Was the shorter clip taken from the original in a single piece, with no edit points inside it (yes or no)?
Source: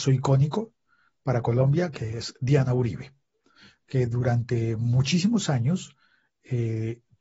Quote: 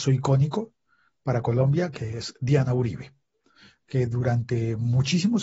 yes